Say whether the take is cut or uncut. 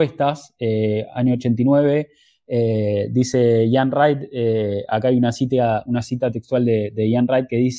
uncut